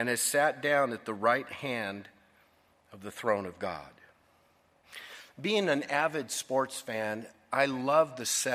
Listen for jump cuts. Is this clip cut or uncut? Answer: uncut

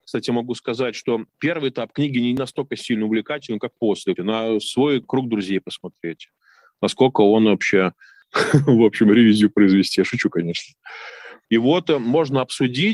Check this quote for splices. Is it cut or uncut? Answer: cut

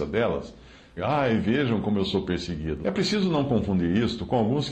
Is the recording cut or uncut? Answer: cut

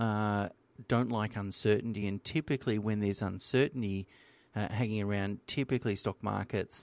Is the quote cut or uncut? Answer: uncut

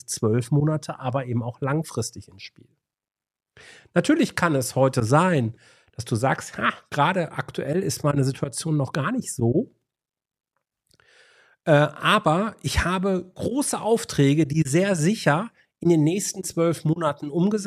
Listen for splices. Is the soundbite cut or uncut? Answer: uncut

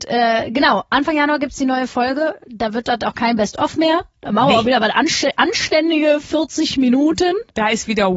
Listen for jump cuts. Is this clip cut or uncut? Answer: uncut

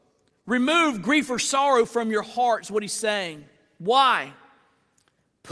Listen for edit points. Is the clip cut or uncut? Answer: uncut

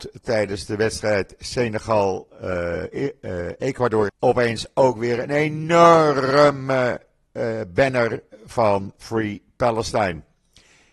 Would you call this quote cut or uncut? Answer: cut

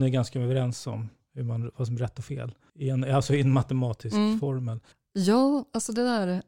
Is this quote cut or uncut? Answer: uncut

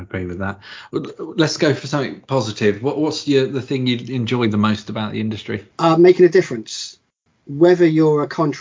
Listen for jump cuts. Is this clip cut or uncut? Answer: cut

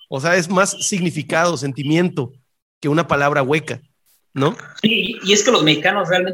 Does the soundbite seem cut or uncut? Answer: uncut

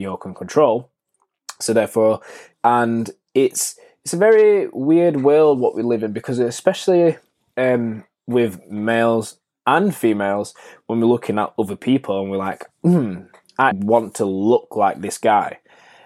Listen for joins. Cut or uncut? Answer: cut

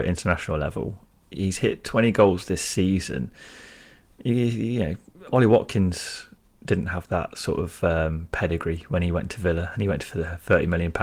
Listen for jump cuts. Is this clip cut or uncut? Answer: uncut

